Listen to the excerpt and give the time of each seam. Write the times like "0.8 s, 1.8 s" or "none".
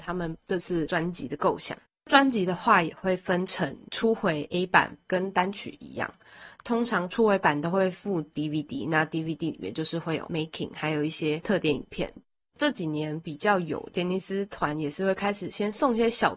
5.0 s